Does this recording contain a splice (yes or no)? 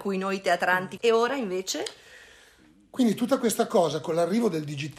yes